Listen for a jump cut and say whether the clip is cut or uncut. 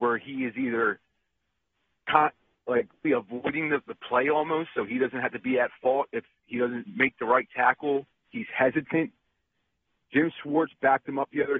cut